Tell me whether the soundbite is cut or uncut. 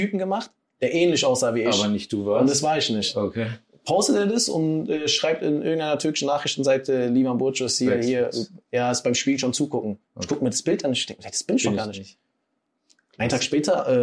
uncut